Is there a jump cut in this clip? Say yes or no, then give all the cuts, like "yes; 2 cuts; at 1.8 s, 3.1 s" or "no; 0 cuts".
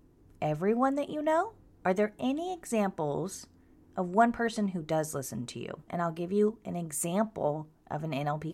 yes; 2 cuts; at 1.8 s, 5.9 s